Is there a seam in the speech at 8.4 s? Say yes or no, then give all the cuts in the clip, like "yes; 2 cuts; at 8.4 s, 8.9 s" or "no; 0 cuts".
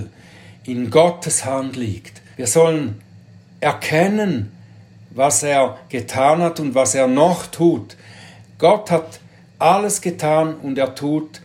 yes; 2 cuts; at 2.3 s, 8.4 s